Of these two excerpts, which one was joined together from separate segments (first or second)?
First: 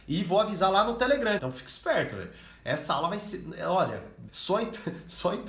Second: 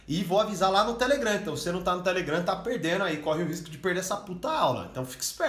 first